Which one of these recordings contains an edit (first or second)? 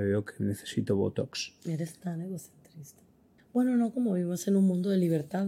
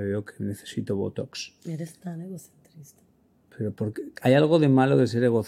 first